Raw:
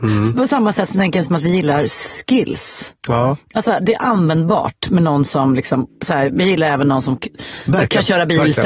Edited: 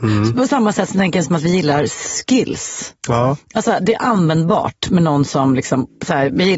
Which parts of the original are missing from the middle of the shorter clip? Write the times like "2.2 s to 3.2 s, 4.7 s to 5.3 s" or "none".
none